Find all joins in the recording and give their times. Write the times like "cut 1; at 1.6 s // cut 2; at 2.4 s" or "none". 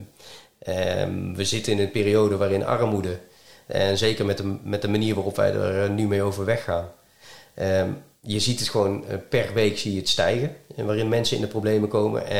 none